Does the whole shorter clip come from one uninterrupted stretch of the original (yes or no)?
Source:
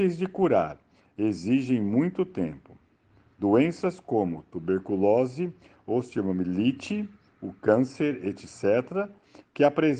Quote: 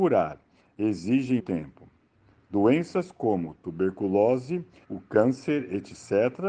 no